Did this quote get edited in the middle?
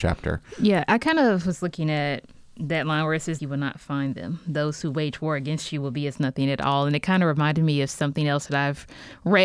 yes; 1 cut; at 3.4 s

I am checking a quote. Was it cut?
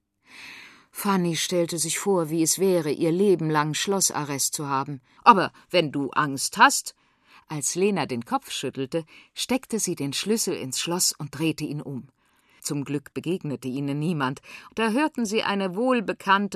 yes; 3 cuts; at 5.2 s, 12.6 s, 14.7 s

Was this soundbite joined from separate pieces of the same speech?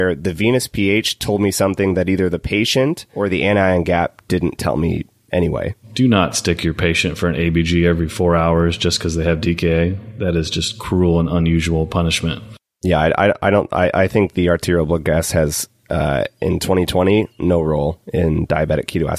no; 0 cuts

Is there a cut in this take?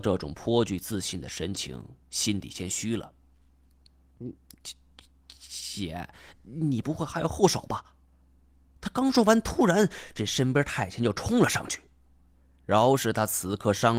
no; 0 cuts

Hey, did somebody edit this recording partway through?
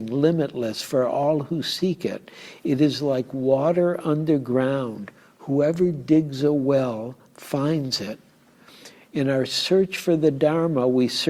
no; 0 cuts

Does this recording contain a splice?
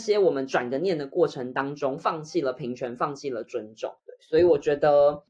no; 0 cuts

